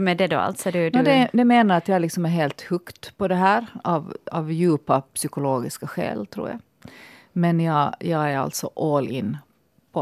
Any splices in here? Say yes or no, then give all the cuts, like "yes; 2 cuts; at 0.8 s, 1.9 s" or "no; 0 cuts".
no; 0 cuts